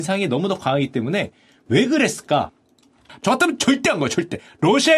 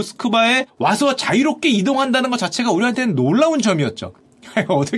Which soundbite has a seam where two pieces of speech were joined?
first; 1 cut; at 3.1 s

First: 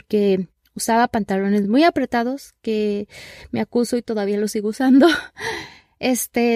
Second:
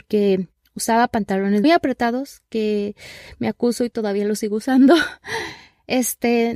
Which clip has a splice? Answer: second; 1 cut; at 1.6 s

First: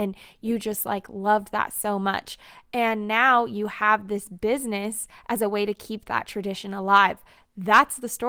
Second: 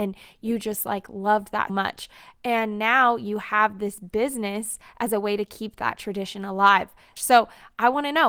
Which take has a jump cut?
second; 2 cuts; at 1.7 s, 7.2 s

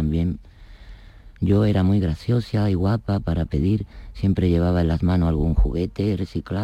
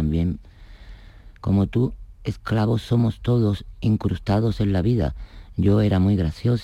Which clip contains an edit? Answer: first; 1 cut; at 1.4 s

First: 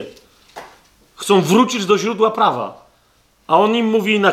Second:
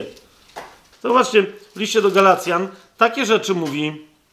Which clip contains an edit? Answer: second; 1 cut; at 0.9 s

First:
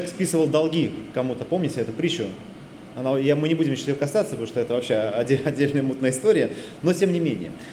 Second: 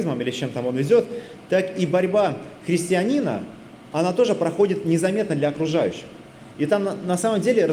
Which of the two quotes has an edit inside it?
second; 1 cut; at 6.5 s

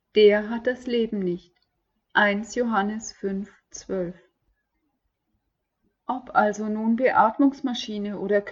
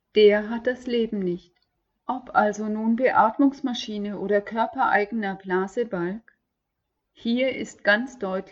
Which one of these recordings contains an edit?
second; 1 cut; at 1.9 s

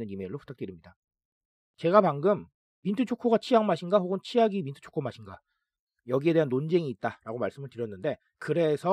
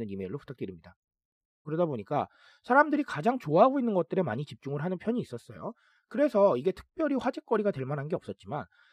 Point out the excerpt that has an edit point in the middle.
second; 1 cut; at 1.6 s

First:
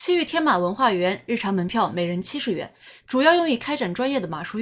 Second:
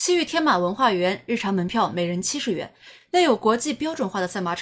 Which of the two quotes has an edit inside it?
first; 1 cut; at 3.0 s

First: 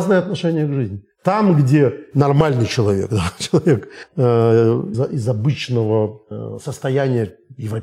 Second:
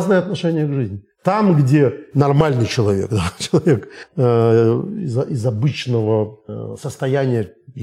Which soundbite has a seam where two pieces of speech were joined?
first; 1 cut; at 4.9 s

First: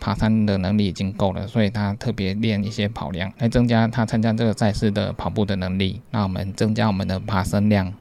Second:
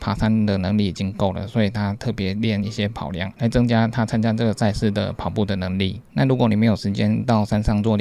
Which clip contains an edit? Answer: first; 1 cut; at 6.1 s

